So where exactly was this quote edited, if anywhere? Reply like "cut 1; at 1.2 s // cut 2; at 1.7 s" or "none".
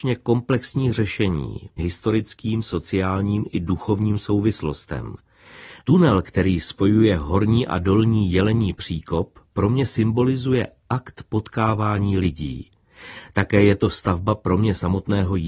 cut 1; at 1.8 s // cut 2; at 5.8 s